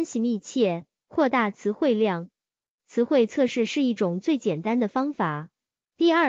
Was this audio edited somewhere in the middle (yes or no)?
yes